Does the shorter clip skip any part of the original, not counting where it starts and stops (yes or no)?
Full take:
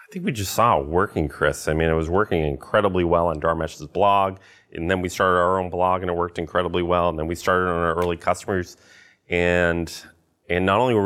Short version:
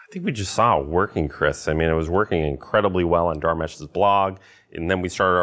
no